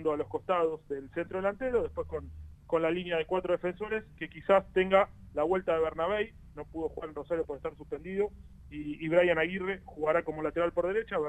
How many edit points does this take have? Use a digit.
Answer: 0